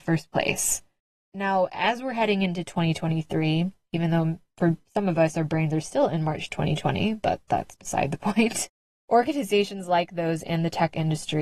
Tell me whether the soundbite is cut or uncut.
uncut